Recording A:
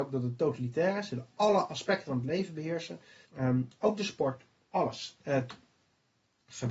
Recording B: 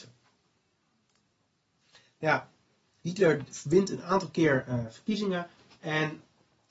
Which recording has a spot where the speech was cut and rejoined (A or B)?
A